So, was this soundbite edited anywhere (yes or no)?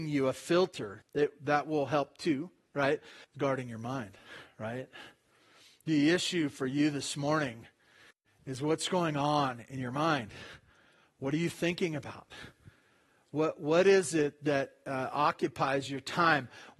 yes